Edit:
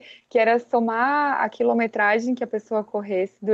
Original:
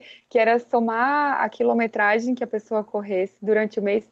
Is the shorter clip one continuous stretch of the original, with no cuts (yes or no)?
yes